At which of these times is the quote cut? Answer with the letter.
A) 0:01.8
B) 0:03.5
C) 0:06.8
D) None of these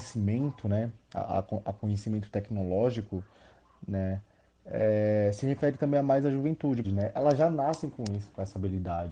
C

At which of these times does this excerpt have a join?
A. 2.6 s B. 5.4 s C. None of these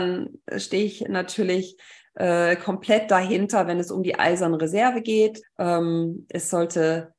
B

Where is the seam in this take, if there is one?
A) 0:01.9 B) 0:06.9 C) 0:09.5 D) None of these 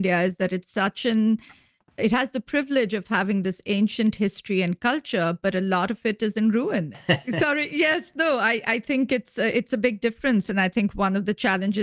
B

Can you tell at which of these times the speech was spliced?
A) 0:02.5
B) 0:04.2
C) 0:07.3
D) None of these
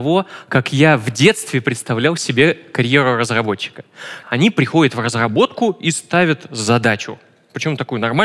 B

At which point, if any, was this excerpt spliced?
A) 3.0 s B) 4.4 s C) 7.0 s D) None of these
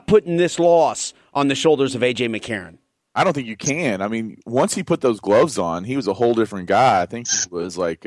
D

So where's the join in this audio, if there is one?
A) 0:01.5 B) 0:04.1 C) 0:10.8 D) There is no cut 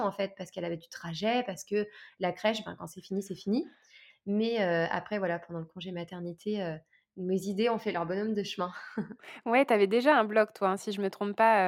B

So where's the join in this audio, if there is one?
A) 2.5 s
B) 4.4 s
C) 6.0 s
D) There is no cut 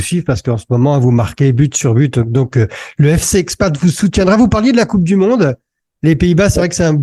D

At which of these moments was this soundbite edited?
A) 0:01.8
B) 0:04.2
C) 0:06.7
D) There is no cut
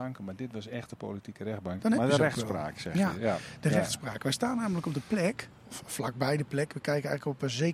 A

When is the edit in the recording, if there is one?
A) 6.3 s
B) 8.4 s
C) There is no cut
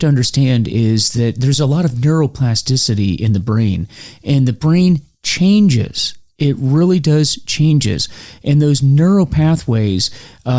C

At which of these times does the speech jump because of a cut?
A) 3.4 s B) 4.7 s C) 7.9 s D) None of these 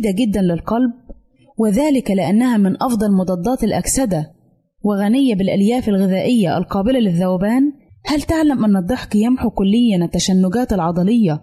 C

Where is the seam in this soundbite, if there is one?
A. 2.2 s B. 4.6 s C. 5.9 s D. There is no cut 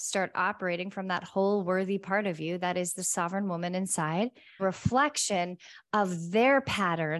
B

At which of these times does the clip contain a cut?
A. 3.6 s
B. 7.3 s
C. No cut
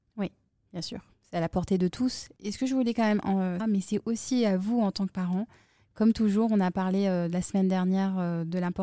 A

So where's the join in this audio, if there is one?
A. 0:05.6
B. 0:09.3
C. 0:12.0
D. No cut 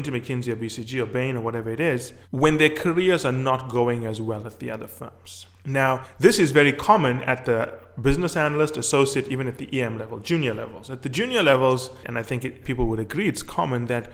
C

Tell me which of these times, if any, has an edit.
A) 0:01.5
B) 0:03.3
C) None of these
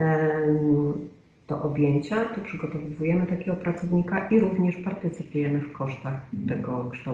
A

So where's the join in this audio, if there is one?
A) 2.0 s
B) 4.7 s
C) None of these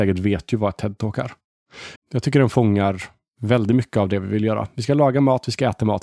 A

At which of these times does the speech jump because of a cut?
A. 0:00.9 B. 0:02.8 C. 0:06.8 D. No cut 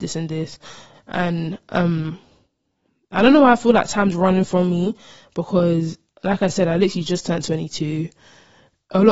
A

